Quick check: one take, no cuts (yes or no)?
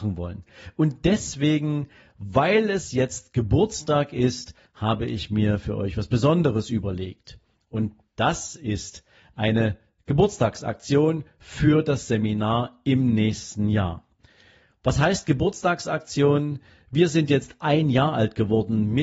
yes